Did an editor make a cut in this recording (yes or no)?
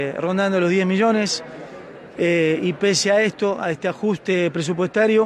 no